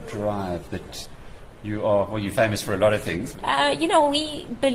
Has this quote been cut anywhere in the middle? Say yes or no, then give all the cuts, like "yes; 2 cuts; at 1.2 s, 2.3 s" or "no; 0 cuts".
yes; 1 cut; at 3.4 s